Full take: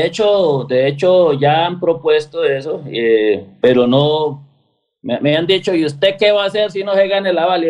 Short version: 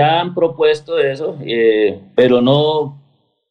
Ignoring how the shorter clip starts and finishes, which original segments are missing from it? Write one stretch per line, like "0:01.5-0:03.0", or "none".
none